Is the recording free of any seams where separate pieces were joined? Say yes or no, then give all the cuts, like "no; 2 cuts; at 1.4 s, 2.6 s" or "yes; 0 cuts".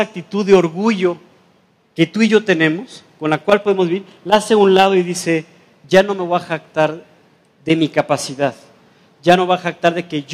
yes; 0 cuts